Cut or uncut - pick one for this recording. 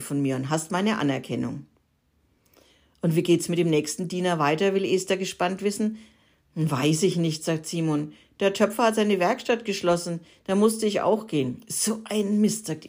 uncut